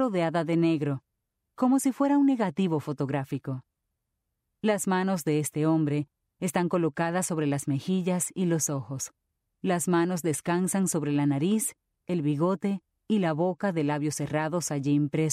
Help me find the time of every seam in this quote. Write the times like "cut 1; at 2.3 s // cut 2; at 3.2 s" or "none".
cut 1; at 9.5 s